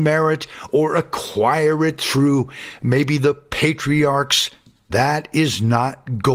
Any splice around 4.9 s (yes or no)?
yes